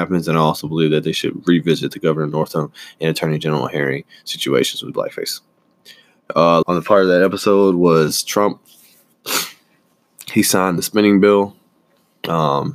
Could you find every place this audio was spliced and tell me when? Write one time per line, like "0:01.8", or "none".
0:06.6